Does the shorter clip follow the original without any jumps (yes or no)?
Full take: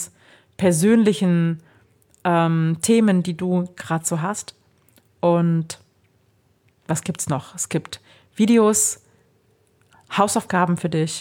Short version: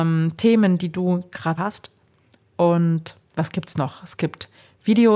no